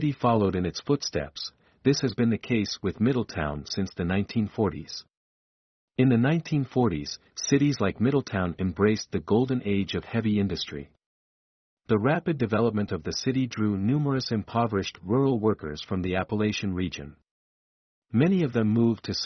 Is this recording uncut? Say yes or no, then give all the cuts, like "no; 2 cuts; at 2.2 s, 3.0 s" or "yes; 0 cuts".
yes; 0 cuts